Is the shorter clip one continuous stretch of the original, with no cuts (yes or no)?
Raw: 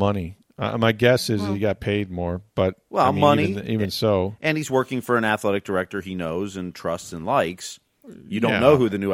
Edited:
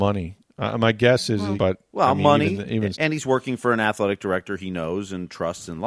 no